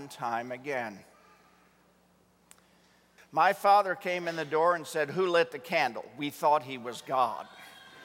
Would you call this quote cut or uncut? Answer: cut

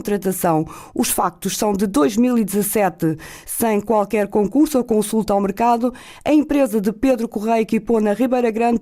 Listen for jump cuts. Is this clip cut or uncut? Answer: uncut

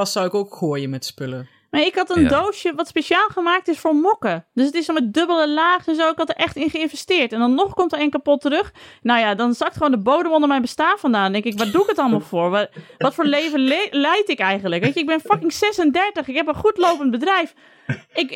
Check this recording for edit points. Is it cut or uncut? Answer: uncut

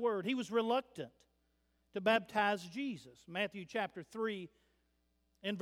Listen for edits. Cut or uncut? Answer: uncut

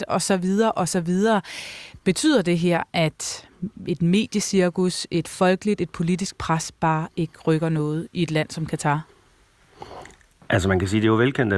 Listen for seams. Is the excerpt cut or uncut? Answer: uncut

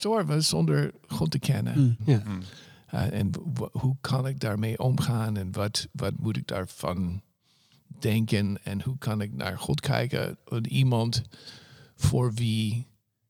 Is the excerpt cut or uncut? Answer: cut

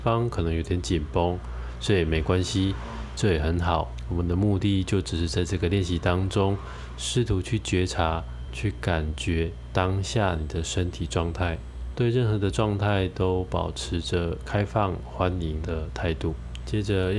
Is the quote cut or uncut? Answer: uncut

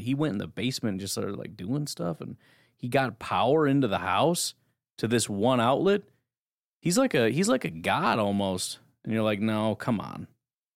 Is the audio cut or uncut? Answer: uncut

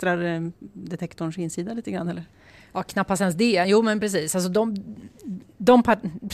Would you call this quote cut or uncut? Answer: uncut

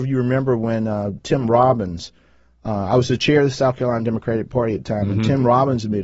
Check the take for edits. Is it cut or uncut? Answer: uncut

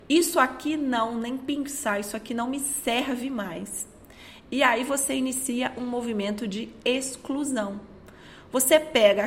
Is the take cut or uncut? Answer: uncut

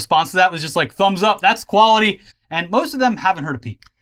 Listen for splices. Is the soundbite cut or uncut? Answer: cut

